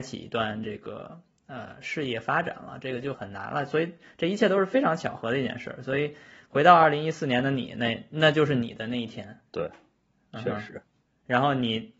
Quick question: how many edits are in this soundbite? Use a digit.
2